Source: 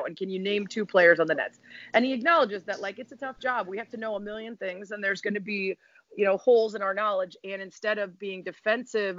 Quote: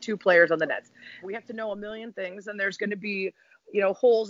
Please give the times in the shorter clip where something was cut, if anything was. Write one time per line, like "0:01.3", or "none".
0:01.2